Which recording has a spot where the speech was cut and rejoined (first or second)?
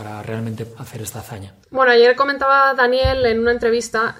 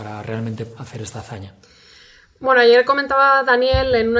first